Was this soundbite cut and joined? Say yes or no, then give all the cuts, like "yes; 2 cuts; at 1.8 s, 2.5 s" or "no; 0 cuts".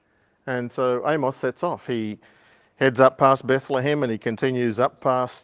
no; 0 cuts